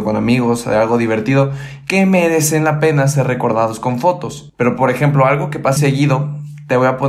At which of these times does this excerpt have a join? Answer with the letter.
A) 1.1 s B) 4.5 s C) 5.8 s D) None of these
C